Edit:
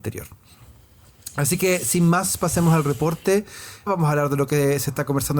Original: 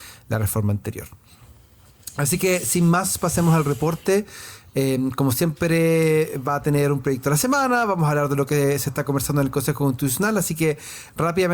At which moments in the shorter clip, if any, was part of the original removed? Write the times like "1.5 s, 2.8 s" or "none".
3.9 s